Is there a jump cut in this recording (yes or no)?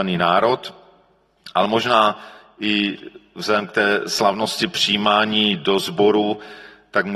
no